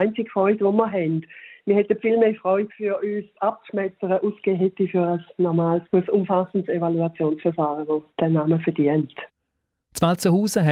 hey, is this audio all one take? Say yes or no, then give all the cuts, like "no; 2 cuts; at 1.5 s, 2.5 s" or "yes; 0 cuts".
no; 3 cuts; at 2.7 s, 5.9 s, 8.1 s